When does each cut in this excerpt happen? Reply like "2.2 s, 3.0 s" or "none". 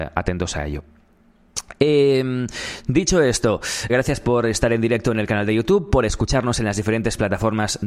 3.9 s